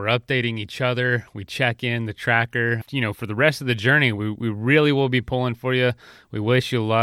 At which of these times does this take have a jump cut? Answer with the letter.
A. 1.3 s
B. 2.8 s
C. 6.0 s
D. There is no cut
B